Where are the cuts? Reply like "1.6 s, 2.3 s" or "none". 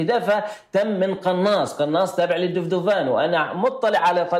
none